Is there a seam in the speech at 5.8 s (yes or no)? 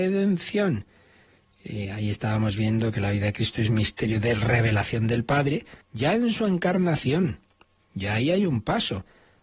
yes